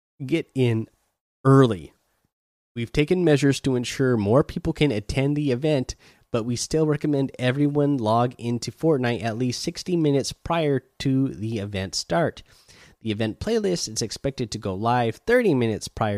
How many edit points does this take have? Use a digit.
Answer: 0